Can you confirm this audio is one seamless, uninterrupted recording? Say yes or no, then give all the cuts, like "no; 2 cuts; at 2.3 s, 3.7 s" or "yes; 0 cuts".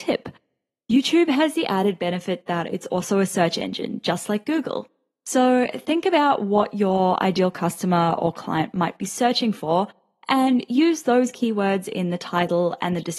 yes; 0 cuts